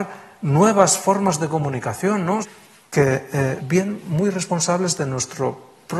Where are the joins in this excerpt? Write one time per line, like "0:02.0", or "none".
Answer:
0:02.4
0:03.6